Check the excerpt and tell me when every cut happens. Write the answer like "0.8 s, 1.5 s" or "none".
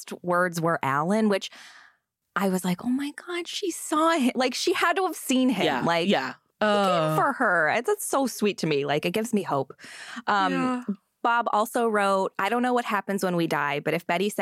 none